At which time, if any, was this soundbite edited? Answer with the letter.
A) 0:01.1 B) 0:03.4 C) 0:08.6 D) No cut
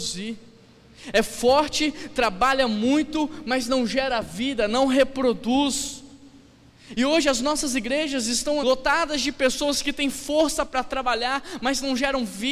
C